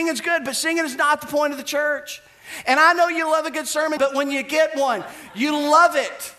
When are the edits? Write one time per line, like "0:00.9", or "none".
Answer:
0:04.0